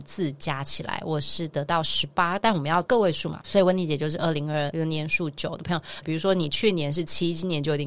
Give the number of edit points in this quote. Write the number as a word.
two